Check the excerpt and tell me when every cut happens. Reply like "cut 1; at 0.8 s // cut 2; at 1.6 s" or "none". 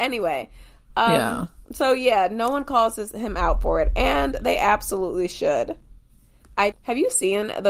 cut 1; at 1.7 s // cut 2; at 6.7 s